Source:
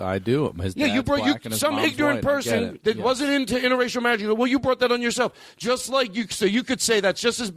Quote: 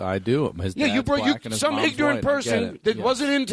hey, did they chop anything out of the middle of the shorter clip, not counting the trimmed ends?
no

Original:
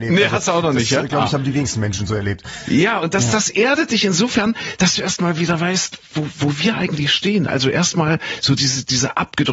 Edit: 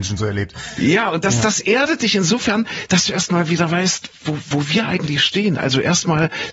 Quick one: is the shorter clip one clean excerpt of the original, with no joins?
yes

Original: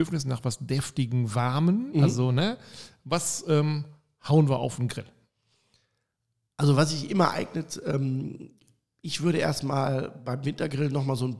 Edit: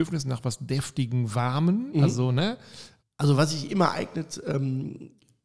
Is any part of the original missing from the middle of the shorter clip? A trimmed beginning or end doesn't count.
yes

